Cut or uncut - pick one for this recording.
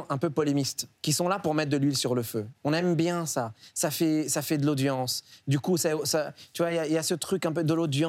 cut